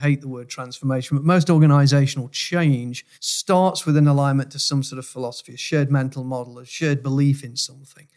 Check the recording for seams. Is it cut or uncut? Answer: cut